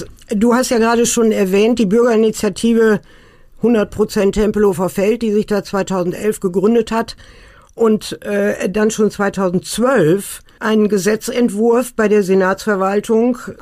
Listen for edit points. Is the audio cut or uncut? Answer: uncut